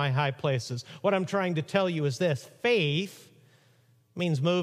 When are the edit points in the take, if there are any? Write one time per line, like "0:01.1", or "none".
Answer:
none